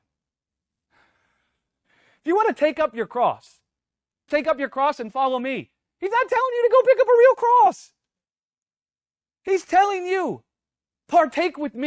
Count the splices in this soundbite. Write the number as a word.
one